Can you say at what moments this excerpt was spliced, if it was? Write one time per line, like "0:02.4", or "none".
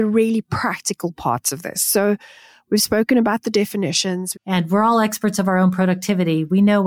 0:04.3